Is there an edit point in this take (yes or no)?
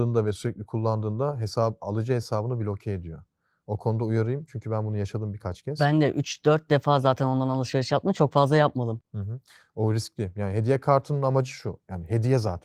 no